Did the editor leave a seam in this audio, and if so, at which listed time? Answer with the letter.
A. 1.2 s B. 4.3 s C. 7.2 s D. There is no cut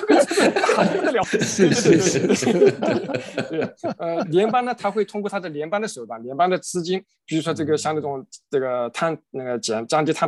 A